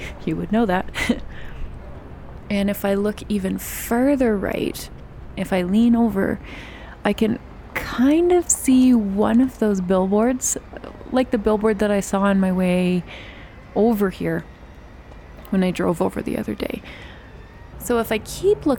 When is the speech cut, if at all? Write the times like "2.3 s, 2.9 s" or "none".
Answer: 17.7 s